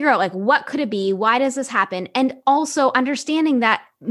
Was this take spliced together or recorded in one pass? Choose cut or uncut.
uncut